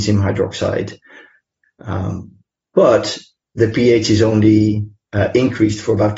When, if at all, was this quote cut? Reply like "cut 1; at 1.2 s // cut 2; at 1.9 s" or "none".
cut 1; at 1.6 s